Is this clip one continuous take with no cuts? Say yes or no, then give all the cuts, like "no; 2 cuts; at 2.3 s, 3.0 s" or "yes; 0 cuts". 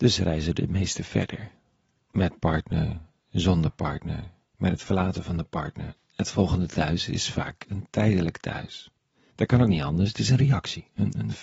no; 2 cuts; at 6.0 s, 9.3 s